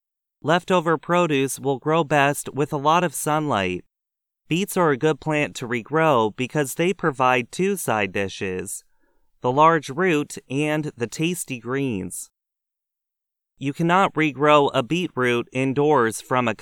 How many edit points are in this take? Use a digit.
1